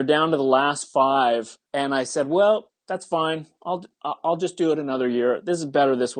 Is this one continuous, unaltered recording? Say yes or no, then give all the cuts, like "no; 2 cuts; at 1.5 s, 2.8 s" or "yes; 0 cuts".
no; 2 cuts; at 1.7 s, 2.7 s